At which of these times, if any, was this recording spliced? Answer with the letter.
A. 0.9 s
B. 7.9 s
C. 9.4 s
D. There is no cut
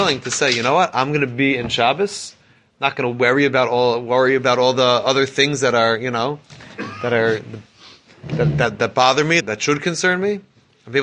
C